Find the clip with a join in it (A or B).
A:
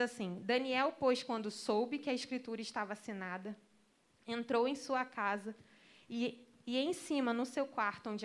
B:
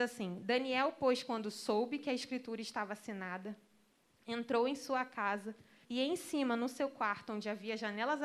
B